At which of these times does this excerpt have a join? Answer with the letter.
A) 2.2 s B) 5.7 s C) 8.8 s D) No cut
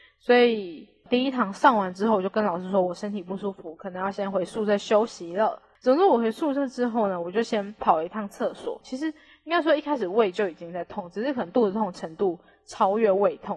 C